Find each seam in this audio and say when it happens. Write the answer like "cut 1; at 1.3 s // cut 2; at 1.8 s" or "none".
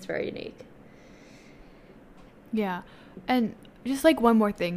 none